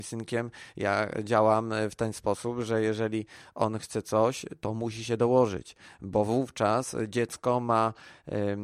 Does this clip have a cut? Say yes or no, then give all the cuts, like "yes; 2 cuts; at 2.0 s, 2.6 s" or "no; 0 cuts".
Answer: no; 0 cuts